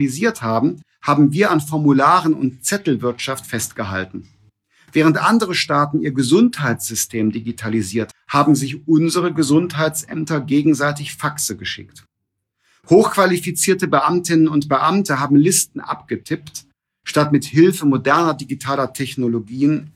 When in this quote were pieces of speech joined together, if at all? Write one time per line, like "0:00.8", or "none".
0:08.1